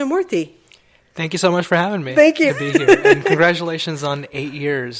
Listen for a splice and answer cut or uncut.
cut